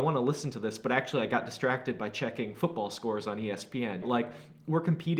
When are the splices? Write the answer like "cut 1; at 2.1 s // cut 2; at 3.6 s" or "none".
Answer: cut 1; at 4.0 s